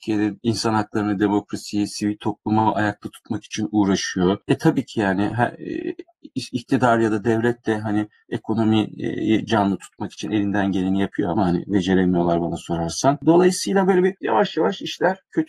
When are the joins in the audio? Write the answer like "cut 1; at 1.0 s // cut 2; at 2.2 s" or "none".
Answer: none